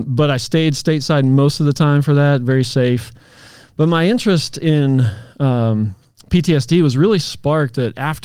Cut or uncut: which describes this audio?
uncut